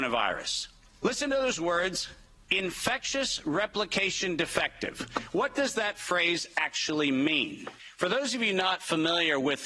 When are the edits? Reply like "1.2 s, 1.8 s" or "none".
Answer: none